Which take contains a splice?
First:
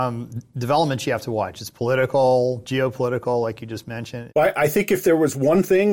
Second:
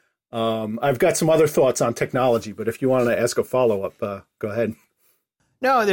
first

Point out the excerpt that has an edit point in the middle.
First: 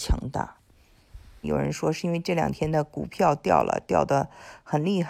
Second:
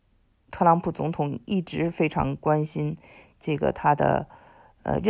first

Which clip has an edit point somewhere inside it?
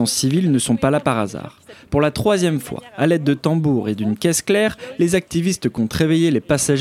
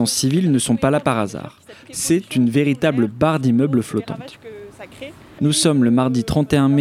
second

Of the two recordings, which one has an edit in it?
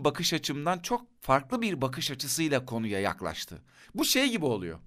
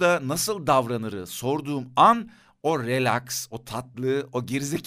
first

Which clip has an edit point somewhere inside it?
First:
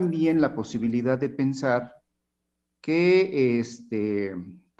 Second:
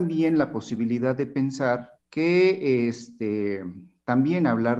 second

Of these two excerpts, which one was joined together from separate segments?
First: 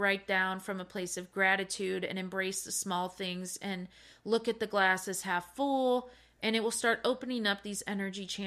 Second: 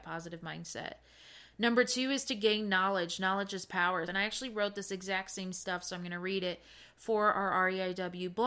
second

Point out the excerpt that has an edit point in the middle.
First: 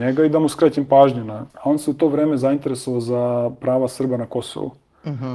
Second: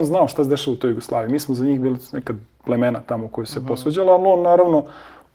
first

